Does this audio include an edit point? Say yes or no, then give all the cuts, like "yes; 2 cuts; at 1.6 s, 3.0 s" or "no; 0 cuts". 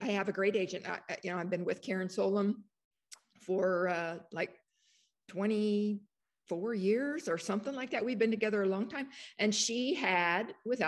no; 0 cuts